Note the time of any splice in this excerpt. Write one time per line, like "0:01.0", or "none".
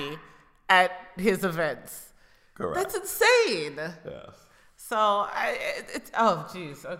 none